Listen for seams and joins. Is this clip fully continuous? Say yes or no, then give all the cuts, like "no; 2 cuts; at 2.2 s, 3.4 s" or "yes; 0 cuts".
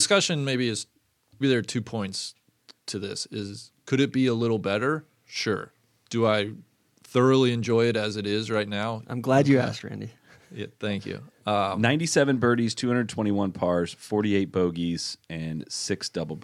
no; 2 cuts; at 1.4 s, 9.0 s